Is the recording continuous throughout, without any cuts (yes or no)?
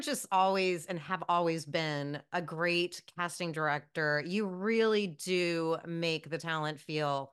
yes